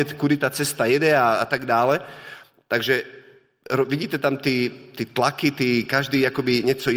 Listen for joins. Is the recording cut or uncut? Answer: uncut